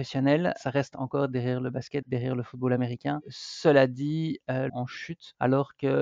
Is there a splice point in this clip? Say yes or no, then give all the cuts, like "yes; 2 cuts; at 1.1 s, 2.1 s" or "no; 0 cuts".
yes; 2 cuts; at 2.0 s, 4.7 s